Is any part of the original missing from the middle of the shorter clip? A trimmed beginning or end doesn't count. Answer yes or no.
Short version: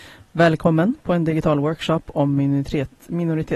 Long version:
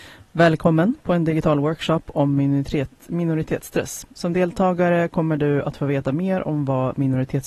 no